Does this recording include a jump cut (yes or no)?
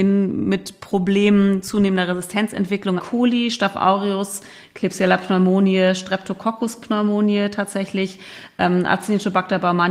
yes